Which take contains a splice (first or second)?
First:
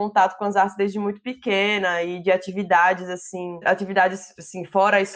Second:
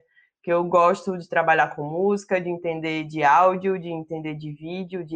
first